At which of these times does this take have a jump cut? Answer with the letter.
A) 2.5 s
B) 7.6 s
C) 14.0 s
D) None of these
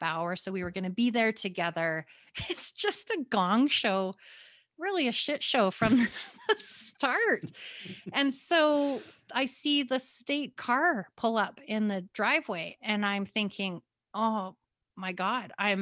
D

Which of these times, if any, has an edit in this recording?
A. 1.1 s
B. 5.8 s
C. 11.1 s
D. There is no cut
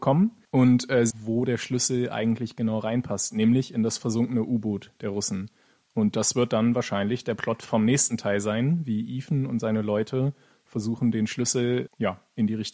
A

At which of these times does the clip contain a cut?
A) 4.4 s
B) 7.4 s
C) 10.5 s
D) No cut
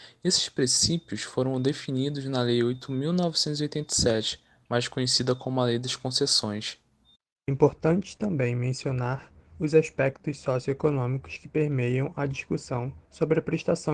D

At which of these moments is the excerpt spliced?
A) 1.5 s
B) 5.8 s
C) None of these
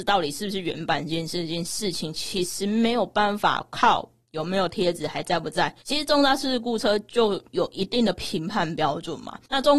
B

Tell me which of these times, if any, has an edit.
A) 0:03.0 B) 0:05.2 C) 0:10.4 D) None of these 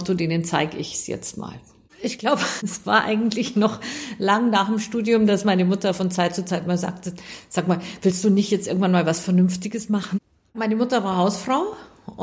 D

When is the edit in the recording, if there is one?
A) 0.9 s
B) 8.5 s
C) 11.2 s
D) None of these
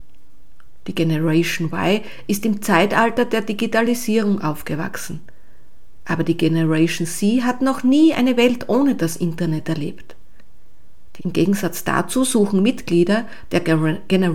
C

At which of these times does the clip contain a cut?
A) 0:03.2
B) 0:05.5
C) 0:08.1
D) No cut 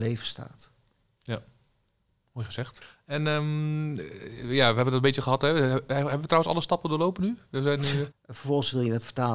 C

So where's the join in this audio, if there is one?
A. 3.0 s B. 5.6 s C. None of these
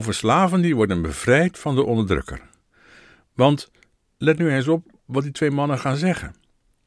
C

